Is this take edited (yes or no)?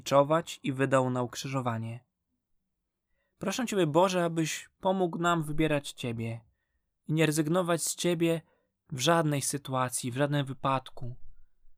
no